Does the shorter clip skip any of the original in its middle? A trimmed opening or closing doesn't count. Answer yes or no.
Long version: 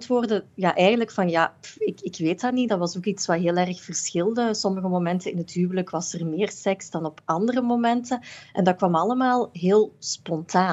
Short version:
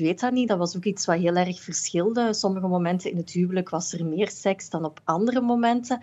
no